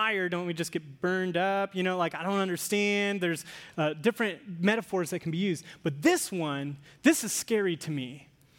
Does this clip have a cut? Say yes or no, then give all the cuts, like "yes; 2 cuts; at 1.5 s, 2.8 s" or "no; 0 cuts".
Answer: no; 0 cuts